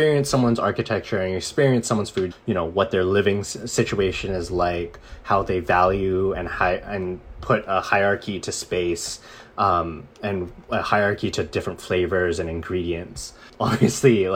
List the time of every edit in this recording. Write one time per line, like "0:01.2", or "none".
0:02.3